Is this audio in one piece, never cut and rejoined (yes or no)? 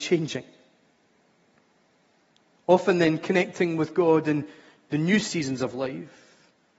yes